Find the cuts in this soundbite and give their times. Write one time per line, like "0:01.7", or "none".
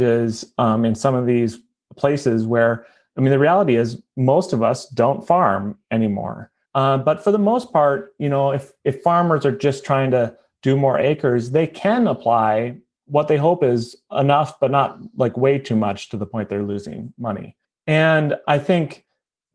0:06.7